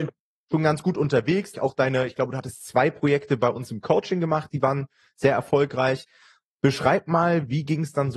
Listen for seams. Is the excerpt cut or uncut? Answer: cut